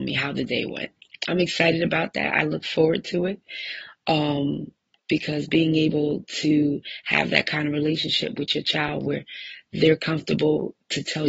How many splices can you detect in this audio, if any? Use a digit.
0